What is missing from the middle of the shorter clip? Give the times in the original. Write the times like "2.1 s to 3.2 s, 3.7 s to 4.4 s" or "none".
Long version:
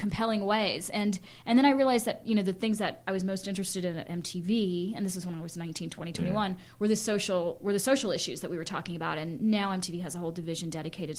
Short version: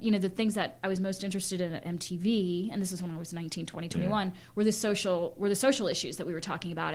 none

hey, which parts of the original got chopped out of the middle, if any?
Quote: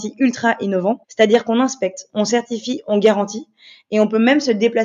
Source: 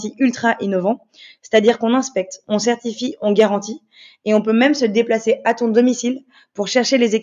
1.0 s to 1.4 s

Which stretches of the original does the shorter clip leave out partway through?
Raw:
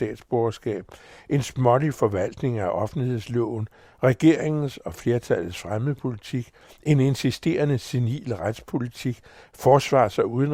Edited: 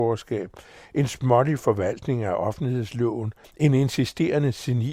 3.8 s to 6.7 s

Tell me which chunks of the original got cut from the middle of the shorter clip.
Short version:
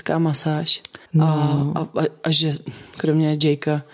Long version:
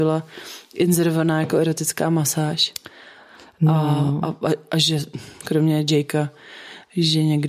3.0 s to 3.5 s

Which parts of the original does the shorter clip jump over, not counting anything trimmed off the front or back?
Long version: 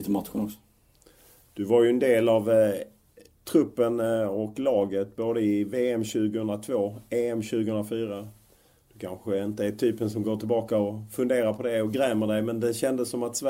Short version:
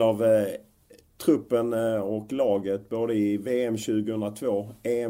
none

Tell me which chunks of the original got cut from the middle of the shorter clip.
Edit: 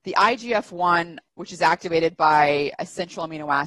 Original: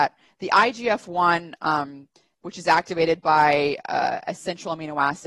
1.5 s to 2.2 s, 3.8 s to 4.2 s

